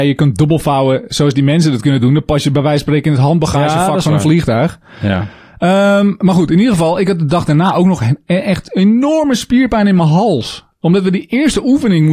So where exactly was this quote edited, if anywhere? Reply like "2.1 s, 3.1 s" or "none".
none

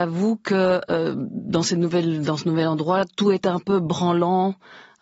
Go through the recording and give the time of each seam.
none

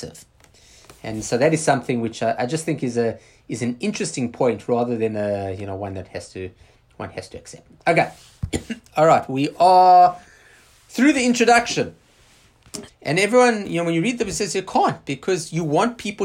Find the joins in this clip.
12.9 s

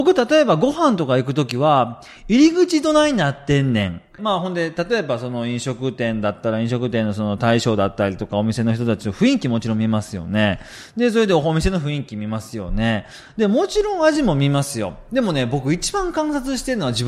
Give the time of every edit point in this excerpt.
4.2 s

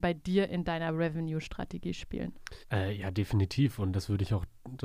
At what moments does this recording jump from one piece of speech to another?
2.6 s

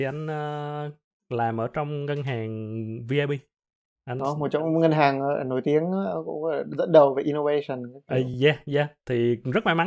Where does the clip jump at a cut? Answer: none

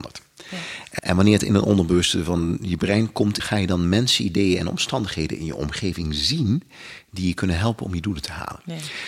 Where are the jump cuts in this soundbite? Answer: 1.0 s, 3.4 s

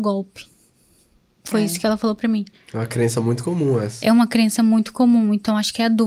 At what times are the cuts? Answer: none

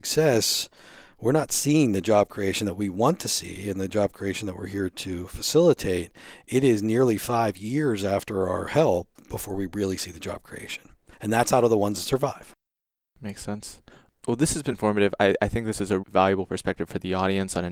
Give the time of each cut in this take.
14.7 s, 16.0 s

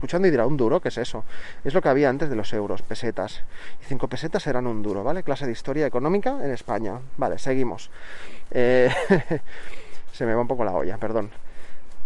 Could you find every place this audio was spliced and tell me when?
none

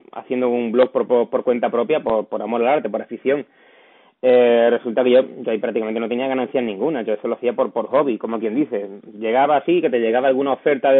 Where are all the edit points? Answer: none

